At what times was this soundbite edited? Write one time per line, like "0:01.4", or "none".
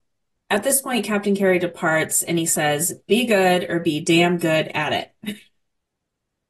none

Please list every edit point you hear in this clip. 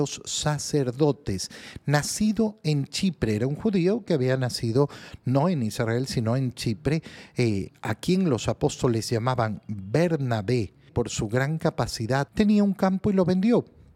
0:10.9
0:12.3

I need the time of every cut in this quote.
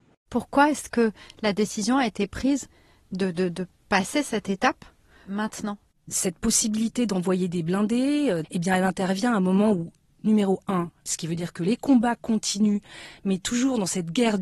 0:08.4
0:11.1

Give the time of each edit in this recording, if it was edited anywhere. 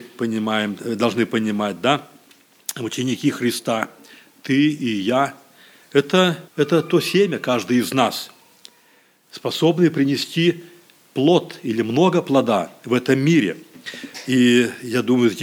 0:06.5

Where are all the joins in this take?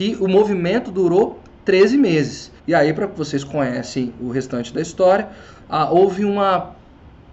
0:02.6

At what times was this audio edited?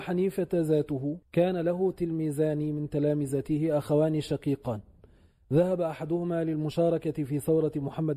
0:01.2

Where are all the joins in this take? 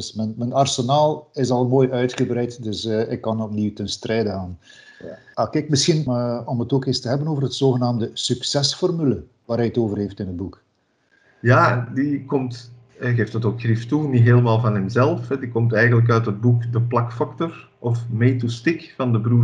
0:06.1

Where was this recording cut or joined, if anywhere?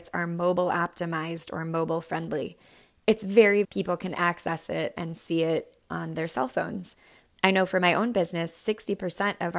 0:03.6

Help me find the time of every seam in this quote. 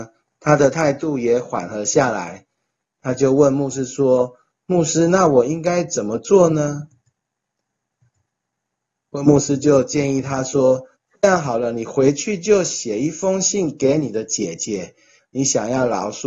0:15.2

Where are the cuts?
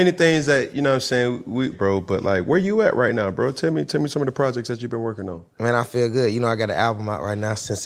0:01.7

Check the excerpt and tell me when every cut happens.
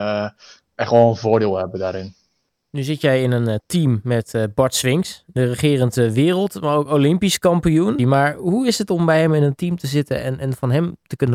0:08.0

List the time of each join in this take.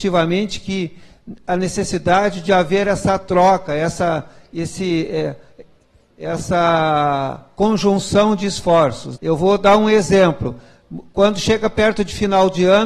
0:09.2

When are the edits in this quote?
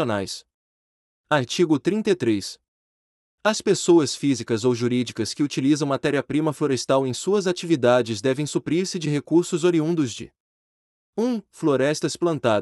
none

